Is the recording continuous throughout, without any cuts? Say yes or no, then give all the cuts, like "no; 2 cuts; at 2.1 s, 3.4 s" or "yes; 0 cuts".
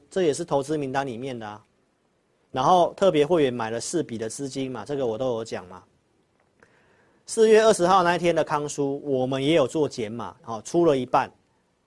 no; 1 cut; at 10.4 s